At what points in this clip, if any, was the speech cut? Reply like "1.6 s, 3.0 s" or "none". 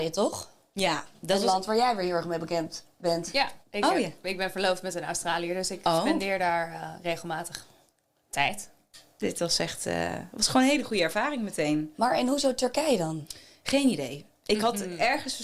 3.6 s, 9.2 s